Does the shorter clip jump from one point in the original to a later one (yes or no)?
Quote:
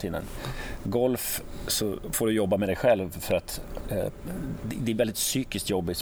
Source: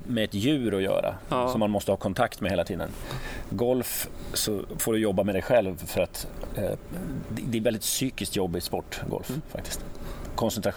no